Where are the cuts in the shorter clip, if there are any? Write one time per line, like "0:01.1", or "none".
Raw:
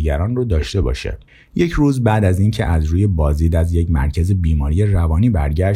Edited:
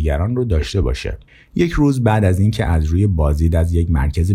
none